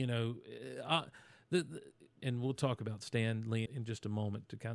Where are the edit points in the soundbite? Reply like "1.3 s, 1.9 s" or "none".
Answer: 2.2 s, 3.7 s